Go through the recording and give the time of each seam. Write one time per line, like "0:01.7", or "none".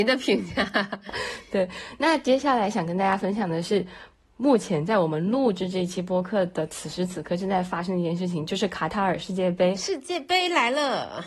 none